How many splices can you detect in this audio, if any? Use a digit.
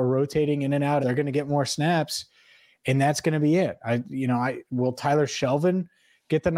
1